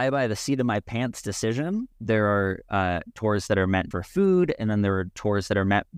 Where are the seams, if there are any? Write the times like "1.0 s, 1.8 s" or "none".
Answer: 1.9 s, 3.9 s